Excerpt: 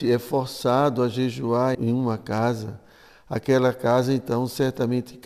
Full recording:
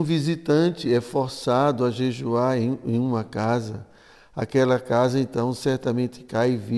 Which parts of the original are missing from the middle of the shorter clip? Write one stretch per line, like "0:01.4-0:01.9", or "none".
0:02.6-0:02.8